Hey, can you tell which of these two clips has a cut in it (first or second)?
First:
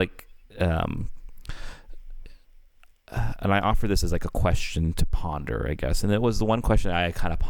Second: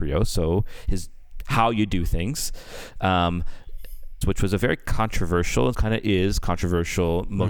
second